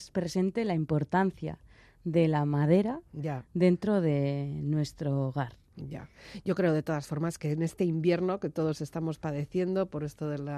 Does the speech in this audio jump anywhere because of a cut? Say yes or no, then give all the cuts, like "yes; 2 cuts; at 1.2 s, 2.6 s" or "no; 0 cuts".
no; 0 cuts